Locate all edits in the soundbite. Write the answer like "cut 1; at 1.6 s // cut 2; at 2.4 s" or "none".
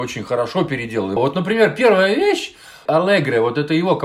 cut 1; at 1.2 s // cut 2; at 2.9 s